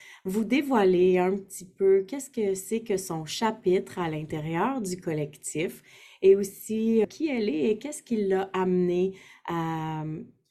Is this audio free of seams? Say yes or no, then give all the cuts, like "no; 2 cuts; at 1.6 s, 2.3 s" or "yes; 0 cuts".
no; 1 cut; at 7.0 s